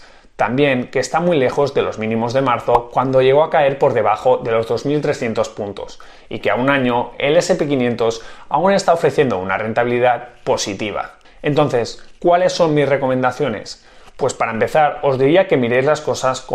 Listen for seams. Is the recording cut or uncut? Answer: cut